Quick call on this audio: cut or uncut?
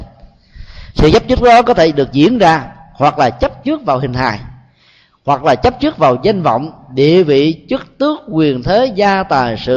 uncut